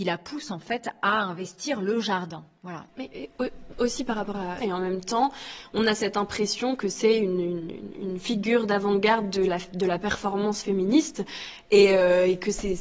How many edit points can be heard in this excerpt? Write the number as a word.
two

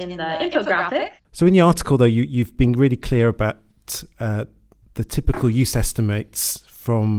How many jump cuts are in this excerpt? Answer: one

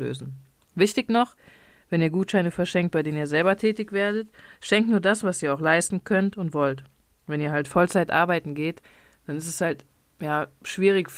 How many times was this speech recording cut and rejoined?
zero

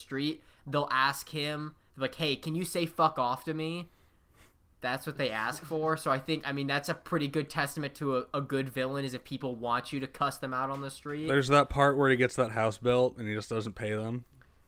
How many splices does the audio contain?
zero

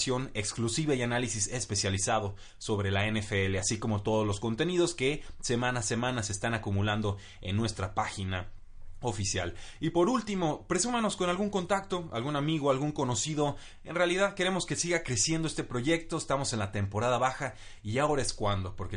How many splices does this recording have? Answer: zero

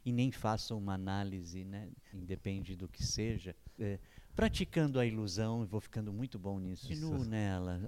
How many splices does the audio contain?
three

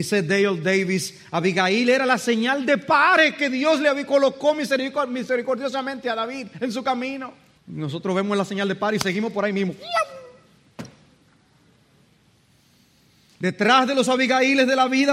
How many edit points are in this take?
one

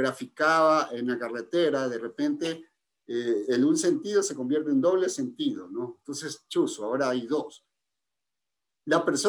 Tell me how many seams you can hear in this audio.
one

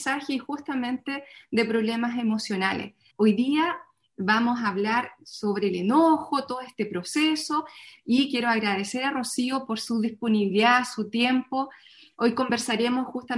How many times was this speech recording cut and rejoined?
one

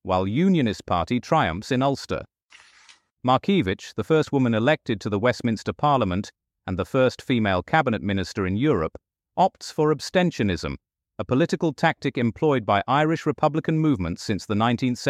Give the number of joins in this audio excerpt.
zero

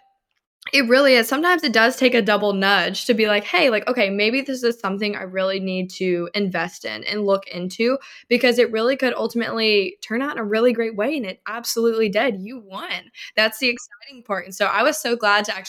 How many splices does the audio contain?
zero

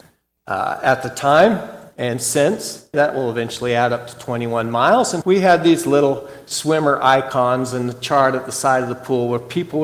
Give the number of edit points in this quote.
two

